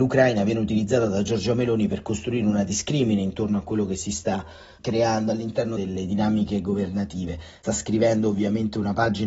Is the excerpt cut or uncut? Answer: uncut